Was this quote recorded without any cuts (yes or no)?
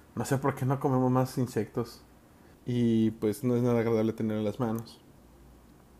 no